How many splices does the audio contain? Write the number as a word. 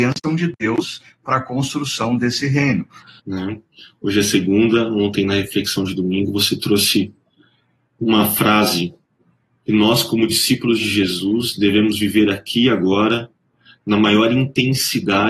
one